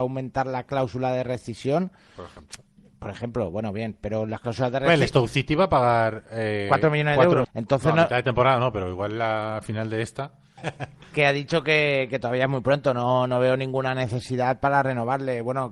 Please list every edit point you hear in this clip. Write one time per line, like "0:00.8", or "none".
0:07.4
0:10.6